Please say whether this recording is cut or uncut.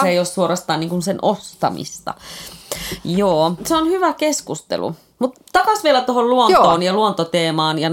cut